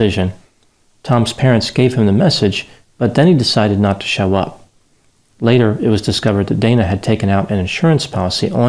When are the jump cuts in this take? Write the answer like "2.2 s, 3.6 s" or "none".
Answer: 2.9 s